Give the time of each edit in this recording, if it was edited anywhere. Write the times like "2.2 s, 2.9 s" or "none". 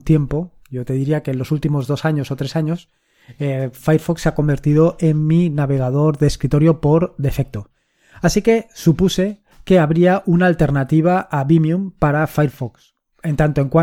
none